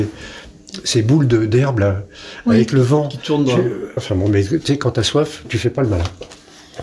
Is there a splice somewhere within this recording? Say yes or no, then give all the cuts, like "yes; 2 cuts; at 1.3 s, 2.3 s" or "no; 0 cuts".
yes; 2 cuts; at 4.0 s, 5.4 s